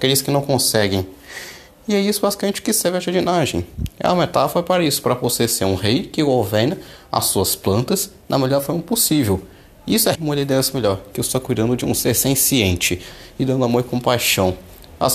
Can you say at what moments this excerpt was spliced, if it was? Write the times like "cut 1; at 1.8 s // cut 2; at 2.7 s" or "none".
cut 1; at 10.1 s